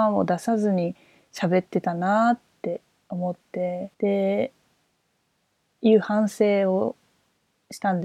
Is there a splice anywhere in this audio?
yes; 1 cut; at 3.9 s

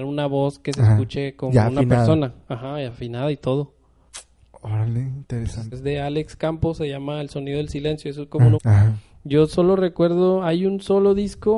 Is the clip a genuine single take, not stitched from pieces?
no; 2 cuts; at 5.7 s, 8.5 s

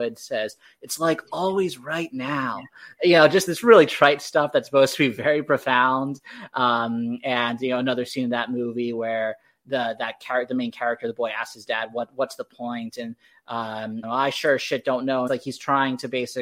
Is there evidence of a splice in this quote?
yes; 3 cuts; at 3.5 s, 14.0 s, 15.3 s

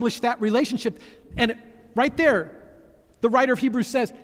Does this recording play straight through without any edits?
yes; 0 cuts

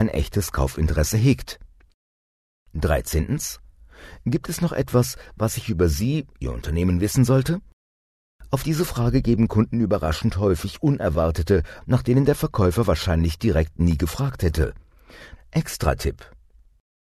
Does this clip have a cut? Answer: yes; 2 cuts; at 11.8 s, 15.4 s

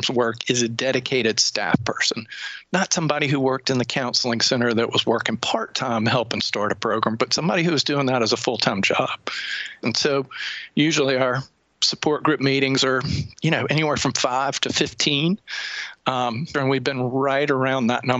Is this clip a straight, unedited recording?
no; 2 cuts; at 9.8 s, 16.5 s

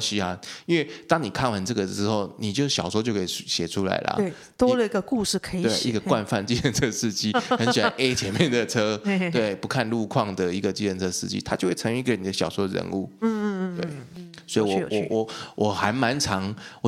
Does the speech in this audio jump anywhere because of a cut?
no; 0 cuts

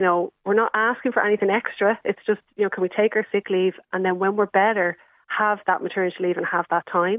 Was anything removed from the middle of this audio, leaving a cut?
no; 0 cuts

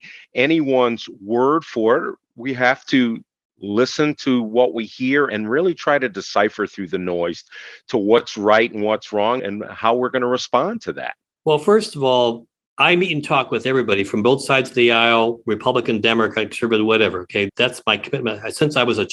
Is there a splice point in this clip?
no; 0 cuts

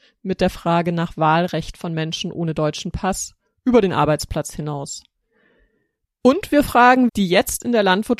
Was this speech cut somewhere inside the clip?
yes; 2 cuts; at 6.0 s, 7.1 s

